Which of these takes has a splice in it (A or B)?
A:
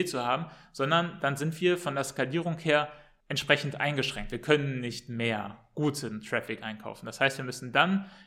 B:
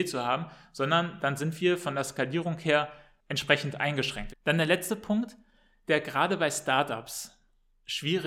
B